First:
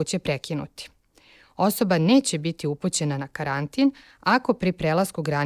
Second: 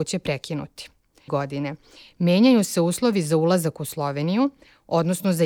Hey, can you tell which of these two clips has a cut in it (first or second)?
second